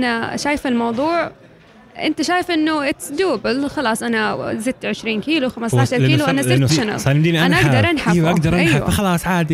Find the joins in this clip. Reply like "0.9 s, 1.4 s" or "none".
6.7 s

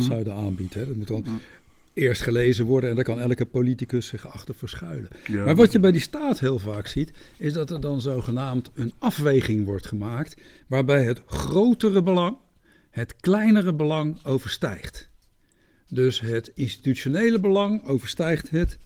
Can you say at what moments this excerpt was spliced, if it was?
none

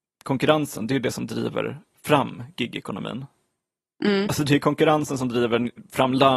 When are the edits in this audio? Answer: none

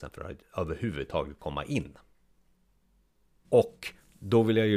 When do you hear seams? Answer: 3.4 s

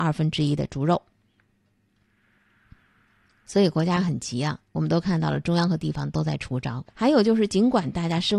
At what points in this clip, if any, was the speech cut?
6.9 s

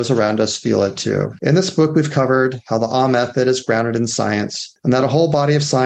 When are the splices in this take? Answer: 1.4 s

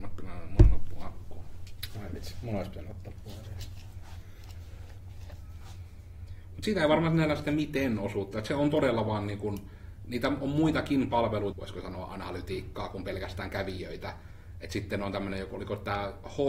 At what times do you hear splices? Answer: 11.5 s

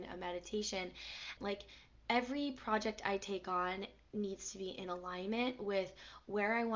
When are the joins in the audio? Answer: 1.4 s

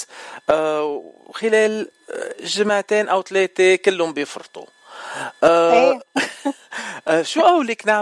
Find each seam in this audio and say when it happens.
none

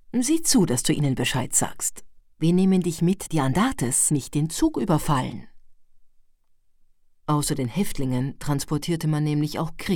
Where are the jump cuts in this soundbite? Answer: 3.3 s

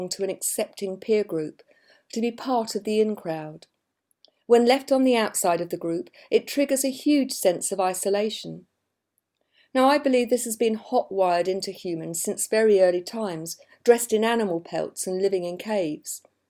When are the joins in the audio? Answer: 13.7 s

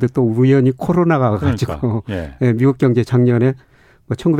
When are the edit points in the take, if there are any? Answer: none

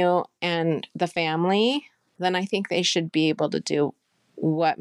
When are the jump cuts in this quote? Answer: none

